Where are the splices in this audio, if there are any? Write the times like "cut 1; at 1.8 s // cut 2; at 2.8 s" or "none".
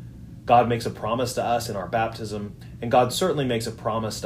none

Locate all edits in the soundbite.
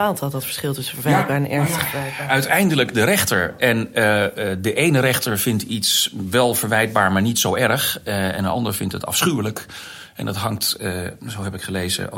none

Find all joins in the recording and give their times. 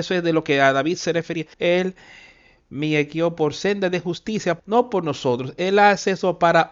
cut 1; at 1.5 s // cut 2; at 4.6 s

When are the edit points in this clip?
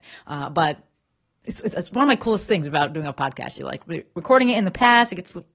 none

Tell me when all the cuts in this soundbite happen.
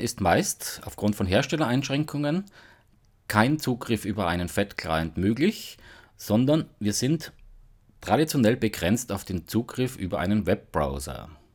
none

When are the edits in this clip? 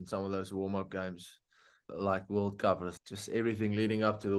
cut 1; at 1.9 s // cut 2; at 3.0 s

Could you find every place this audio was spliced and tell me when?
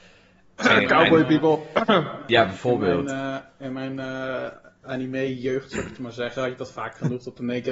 none

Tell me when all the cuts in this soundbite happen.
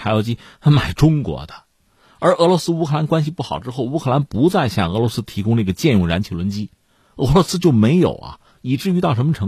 none

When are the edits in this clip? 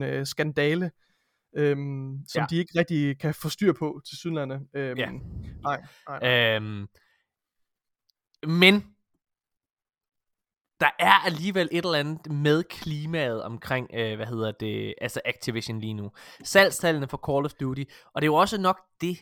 cut 1; at 5.6 s

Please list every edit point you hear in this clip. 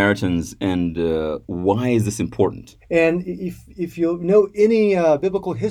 cut 1; at 2.8 s

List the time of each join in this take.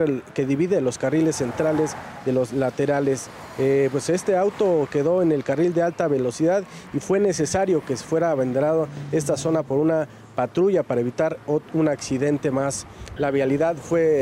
cut 1; at 13.2 s

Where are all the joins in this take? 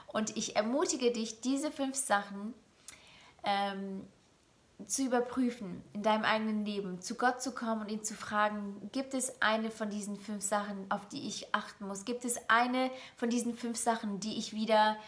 none

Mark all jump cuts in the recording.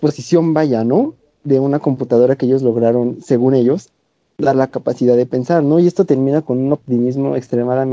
none

